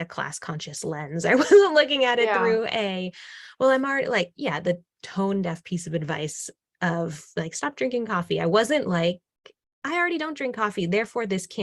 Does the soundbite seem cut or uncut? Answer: uncut